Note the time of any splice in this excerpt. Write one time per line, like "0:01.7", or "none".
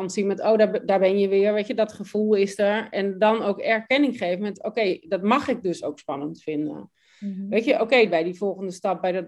0:08.1